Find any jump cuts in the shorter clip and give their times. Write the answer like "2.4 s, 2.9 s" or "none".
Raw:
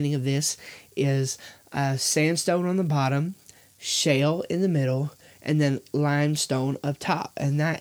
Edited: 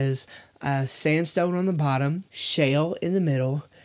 2.3 s